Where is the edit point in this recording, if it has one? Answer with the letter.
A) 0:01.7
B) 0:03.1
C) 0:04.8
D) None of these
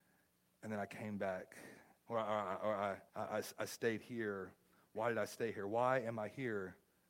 B